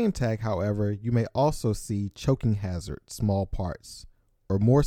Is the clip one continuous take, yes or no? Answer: yes